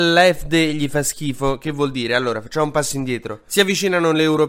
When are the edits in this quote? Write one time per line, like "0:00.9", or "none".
none